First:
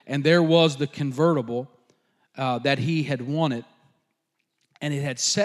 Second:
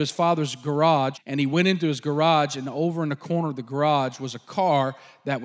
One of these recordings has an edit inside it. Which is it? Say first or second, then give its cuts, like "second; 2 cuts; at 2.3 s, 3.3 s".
second; 1 cut; at 1.1 s